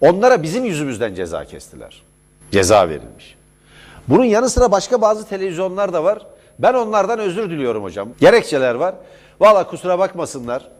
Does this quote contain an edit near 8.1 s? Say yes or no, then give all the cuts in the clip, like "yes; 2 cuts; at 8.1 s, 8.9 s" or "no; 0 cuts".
yes; 2 cuts; at 2.4 s, 8.1 s